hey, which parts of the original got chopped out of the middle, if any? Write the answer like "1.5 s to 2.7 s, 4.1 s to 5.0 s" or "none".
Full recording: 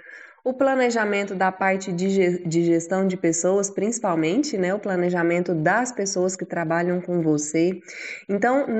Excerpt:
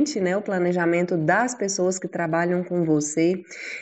none